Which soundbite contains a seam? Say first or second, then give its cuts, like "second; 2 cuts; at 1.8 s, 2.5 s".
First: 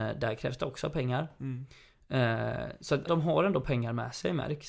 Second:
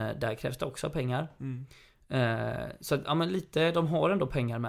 first; 1 cut; at 3.1 s